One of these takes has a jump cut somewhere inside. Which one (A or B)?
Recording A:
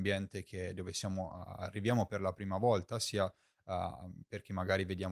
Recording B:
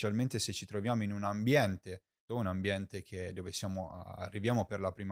B